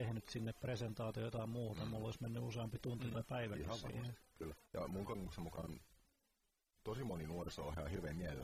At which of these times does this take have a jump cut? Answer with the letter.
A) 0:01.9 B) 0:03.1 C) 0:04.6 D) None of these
C